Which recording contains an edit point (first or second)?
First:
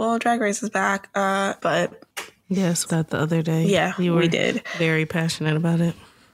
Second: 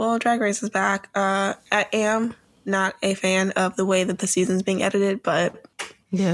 first